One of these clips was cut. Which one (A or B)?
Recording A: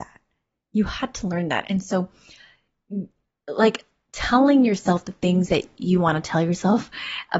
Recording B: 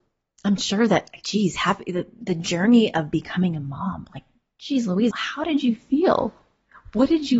B